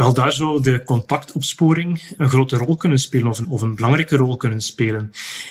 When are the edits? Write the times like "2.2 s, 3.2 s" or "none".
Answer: 3.4 s